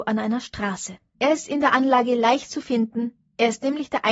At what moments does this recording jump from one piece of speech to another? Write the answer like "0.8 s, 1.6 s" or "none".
1.1 s